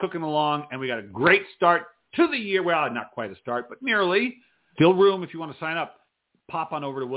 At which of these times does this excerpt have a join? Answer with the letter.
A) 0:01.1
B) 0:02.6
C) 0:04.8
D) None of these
C